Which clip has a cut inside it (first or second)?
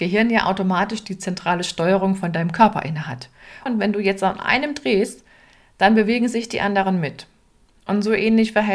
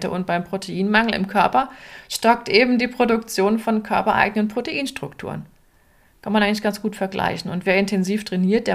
first